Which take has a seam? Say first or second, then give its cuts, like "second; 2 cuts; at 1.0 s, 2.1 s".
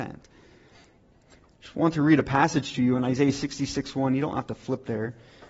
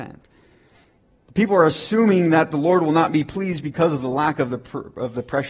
first; 1 cut; at 1.1 s